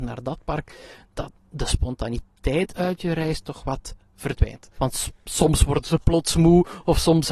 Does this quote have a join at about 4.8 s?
yes; 1 cut; at 4.8 s

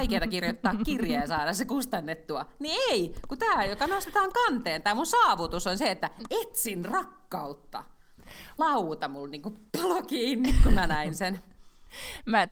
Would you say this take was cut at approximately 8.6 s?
yes; 2 cuts; at 8.6 s, 9.7 s

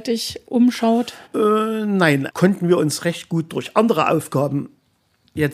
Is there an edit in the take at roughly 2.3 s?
yes; 2 cuts; at 1.2 s, 2.3 s

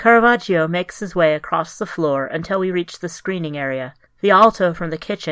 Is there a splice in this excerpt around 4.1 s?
yes; 1 cut; at 4.1 s

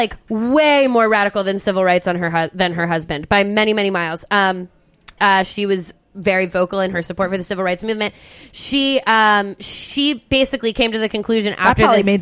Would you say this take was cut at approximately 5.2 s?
yes; 1 cut; at 5.2 s

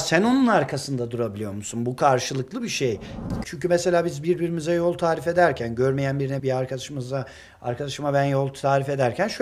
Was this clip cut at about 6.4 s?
yes; 2 cuts; at 3.4 s, 6.4 s

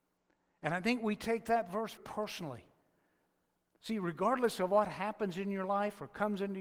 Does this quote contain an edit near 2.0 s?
yes; 1 cut; at 2.0 s

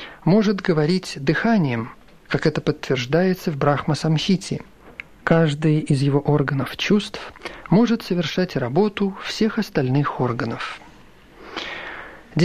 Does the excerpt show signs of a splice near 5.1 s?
no; 0 cuts

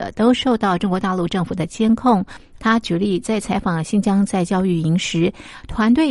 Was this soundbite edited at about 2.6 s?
yes; 1 cut; at 2.6 s

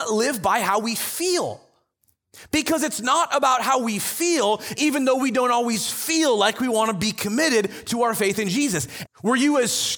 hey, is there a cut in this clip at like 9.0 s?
yes; 2 cuts; at 4.7 s, 9.0 s

